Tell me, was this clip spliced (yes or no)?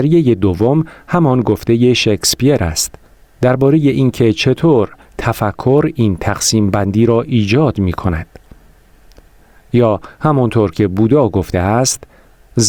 no